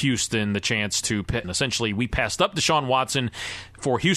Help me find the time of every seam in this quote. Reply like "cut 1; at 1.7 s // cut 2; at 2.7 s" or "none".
cut 1; at 1.4 s